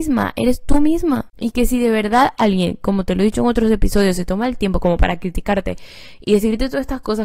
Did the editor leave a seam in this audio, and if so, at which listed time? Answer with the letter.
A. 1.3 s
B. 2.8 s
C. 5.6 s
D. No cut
A